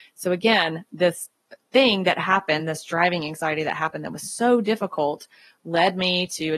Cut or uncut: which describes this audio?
uncut